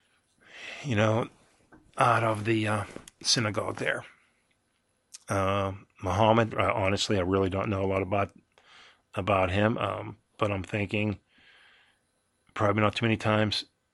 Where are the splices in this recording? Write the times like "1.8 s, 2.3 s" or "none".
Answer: 6.5 s